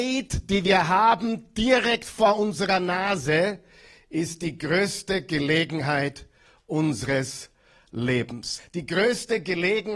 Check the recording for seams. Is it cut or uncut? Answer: cut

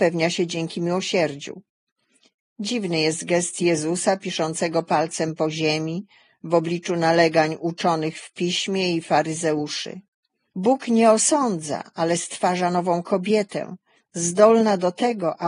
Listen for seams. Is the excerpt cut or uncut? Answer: cut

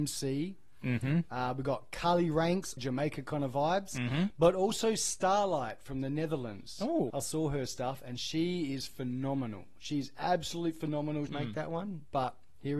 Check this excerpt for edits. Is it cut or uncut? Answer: cut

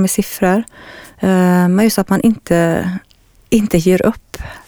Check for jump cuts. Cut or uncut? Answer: uncut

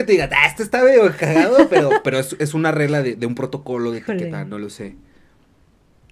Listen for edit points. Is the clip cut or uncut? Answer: uncut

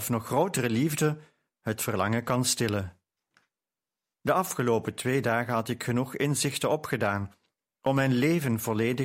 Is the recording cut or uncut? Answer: uncut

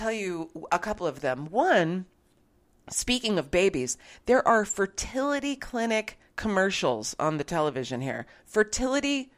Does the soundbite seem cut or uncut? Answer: uncut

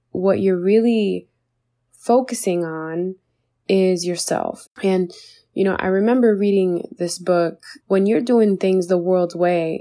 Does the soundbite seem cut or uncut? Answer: cut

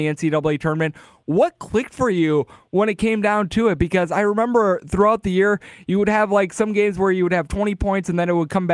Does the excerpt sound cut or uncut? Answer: uncut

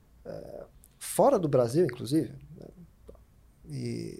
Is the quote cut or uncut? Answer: uncut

